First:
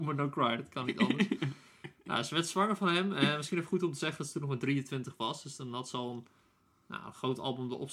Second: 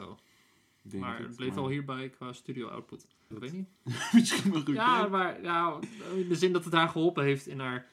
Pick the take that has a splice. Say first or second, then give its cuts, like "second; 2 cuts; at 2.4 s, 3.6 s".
second; 1 cut; at 3.3 s